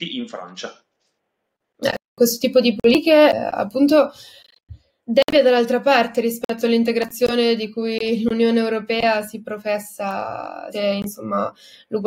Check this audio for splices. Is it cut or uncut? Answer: cut